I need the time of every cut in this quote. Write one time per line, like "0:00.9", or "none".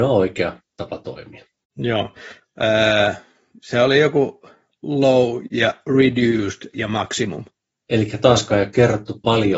0:02.4